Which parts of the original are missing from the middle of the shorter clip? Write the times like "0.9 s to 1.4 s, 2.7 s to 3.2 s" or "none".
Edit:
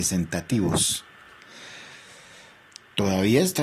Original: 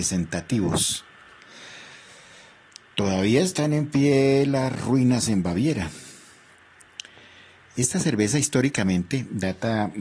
none